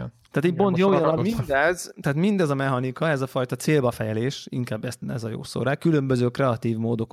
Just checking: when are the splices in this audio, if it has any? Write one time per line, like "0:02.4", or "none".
0:01.2
0:05.0